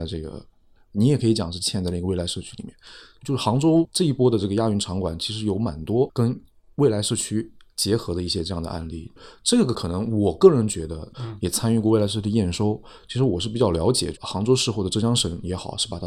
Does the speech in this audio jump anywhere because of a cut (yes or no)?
yes